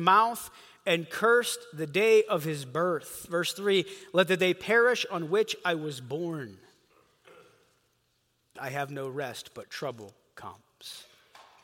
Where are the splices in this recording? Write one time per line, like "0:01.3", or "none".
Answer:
0:08.6

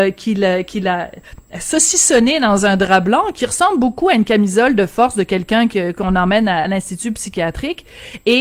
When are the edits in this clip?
none

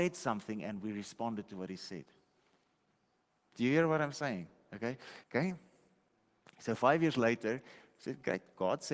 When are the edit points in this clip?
0:05.2

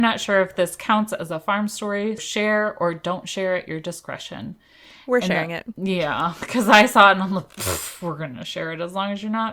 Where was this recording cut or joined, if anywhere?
0:02.2

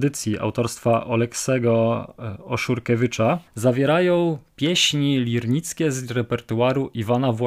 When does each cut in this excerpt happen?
0:03.5

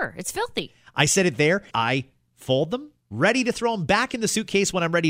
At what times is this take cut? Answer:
0:01.7
0:03.0

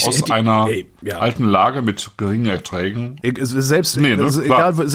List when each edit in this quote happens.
0:03.2

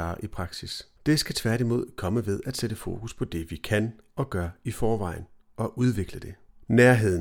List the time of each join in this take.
0:01.0

